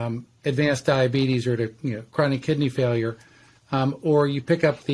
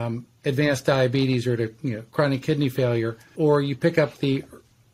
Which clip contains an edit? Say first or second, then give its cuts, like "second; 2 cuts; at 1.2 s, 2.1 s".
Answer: second; 1 cut; at 3.3 s